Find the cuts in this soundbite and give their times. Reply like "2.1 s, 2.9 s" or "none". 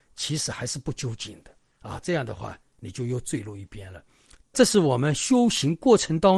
2.0 s, 4.4 s

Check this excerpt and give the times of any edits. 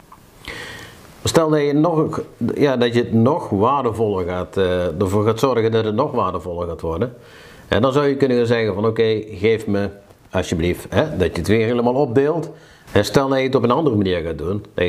10.9 s, 12.9 s

